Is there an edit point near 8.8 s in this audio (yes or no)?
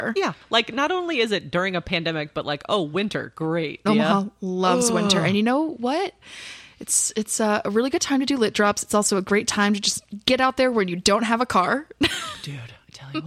no